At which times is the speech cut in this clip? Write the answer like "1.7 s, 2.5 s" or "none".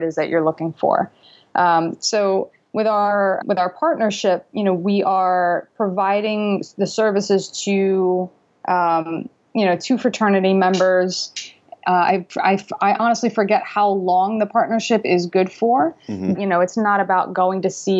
3.4 s, 16.3 s